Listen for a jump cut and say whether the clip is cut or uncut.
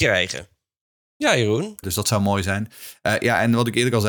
cut